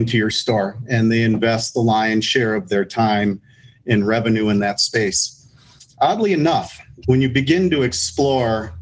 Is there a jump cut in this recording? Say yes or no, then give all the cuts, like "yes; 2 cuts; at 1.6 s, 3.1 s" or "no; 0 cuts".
yes; 2 cuts; at 5.9 s, 7.0 s